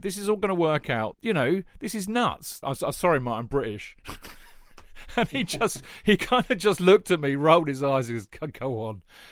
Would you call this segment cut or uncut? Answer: cut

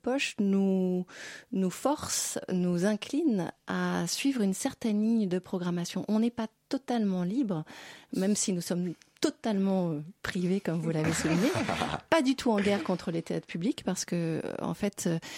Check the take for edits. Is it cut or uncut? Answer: uncut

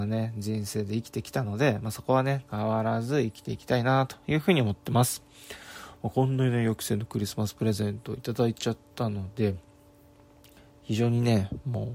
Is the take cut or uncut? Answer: uncut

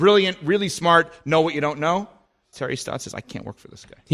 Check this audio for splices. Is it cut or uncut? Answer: cut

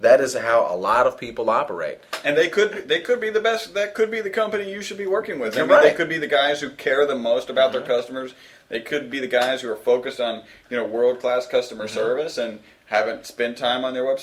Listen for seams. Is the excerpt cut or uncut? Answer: uncut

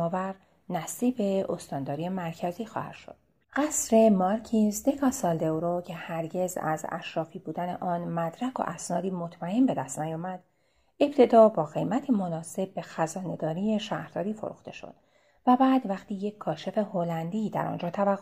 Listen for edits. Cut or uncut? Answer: cut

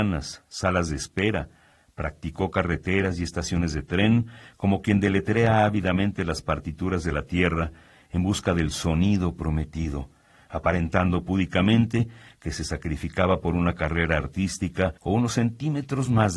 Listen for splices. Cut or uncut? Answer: cut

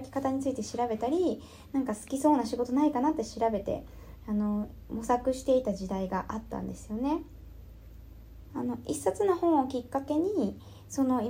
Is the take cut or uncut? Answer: cut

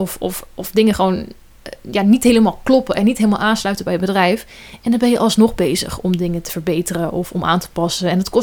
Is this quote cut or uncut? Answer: uncut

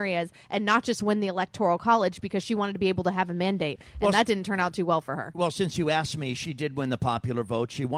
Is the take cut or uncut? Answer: uncut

